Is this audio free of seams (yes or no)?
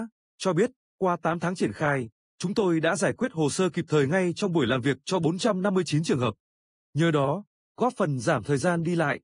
yes